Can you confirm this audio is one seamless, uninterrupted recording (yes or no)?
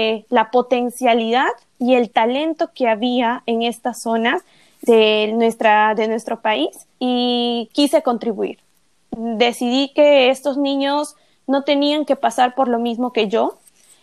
no